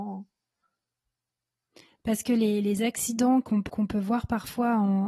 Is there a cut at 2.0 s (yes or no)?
no